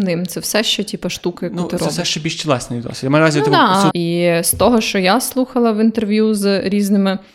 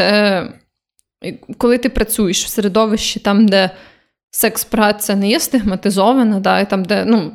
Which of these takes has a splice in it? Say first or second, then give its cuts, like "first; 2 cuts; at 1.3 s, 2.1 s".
first; 1 cut; at 3.9 s